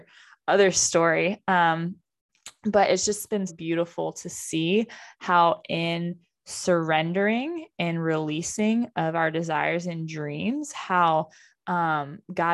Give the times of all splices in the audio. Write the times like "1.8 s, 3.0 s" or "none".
3.5 s